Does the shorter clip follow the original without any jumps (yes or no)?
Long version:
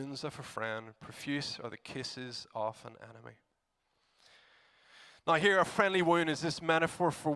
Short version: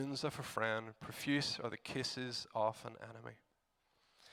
yes